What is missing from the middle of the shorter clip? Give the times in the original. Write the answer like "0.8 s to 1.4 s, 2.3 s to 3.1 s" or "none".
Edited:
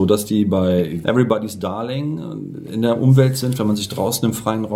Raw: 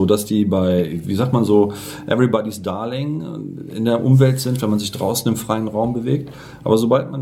1.0 s to 2.1 s